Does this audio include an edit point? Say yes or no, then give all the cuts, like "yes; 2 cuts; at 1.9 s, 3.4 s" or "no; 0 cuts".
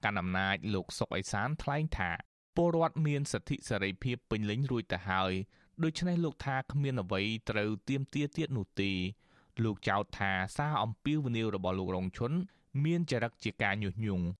no; 0 cuts